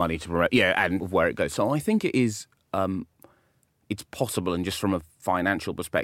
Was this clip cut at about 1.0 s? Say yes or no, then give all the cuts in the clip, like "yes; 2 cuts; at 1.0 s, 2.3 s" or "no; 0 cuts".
yes; 1 cut; at 1.0 s